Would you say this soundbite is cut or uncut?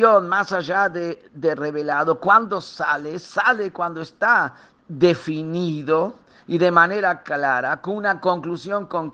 uncut